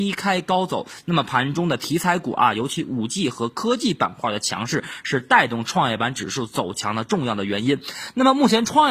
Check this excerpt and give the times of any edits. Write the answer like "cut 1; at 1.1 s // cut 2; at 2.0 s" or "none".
none